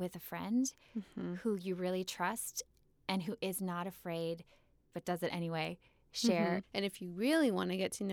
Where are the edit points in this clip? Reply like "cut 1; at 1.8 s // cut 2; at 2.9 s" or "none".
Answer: cut 1; at 4.9 s // cut 2; at 6.6 s

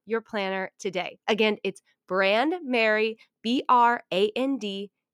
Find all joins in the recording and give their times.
cut 1; at 1.2 s

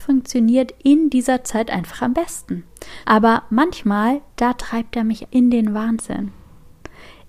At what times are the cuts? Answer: cut 1; at 3.0 s // cut 2; at 5.3 s

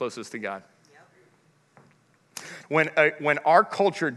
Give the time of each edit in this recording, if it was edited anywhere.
cut 1; at 2.6 s

